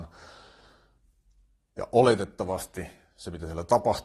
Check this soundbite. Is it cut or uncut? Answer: uncut